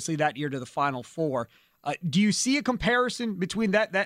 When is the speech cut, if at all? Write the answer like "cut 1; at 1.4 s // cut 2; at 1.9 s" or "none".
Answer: none